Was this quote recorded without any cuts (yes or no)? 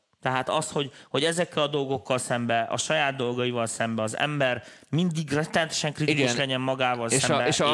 yes